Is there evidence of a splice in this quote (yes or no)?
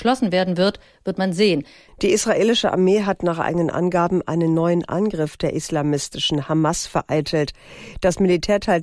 yes